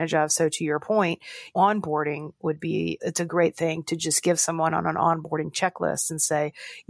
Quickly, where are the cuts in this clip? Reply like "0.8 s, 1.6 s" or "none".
1.5 s, 3.0 s